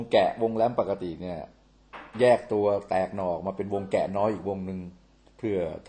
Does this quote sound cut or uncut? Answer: uncut